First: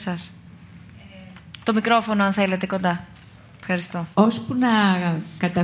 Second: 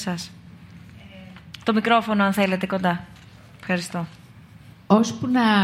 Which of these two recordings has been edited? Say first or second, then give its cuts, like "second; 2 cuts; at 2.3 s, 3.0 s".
first; 1 cut; at 4.1 s